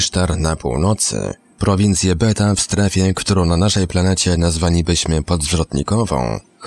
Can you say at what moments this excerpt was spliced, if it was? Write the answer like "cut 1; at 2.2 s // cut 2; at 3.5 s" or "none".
none